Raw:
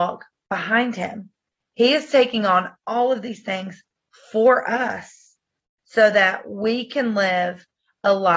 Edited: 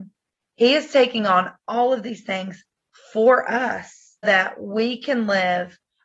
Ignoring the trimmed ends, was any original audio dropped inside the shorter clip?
yes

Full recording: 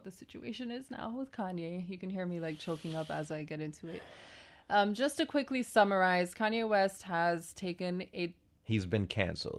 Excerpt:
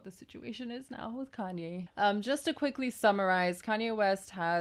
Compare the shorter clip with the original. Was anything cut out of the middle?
yes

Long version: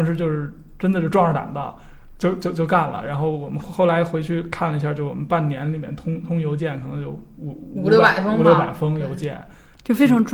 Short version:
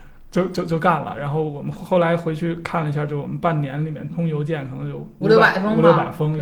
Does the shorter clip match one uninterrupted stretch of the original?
no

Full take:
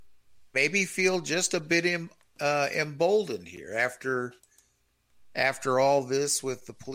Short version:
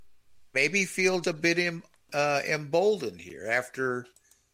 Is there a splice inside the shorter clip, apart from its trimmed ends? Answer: yes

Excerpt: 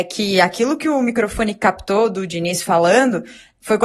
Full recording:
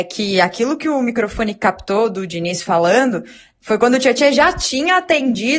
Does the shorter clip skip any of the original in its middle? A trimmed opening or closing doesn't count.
no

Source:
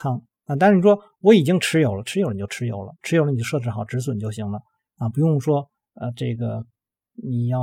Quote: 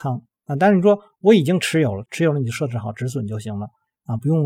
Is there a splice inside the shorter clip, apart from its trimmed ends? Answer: yes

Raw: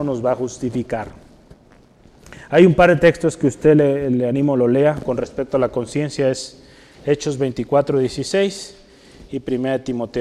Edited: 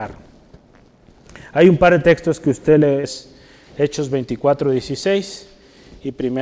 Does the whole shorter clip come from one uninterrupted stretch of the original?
no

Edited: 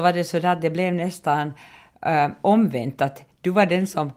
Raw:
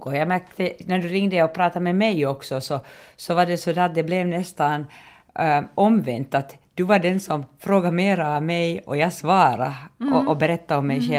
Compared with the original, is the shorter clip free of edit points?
yes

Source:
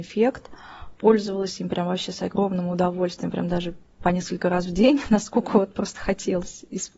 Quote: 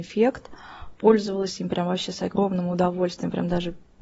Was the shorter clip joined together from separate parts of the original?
no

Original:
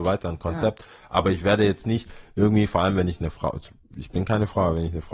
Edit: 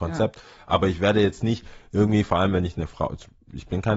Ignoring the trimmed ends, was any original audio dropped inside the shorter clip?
no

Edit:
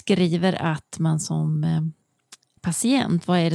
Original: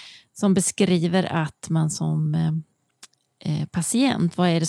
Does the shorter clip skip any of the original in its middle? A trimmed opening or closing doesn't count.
yes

